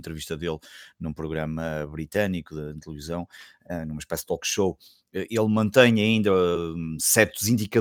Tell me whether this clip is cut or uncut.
uncut